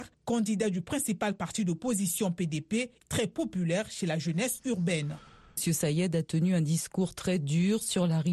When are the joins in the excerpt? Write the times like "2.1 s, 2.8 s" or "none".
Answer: 3.0 s, 5.6 s